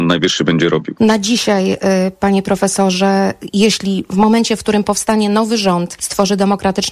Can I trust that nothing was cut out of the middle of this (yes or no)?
yes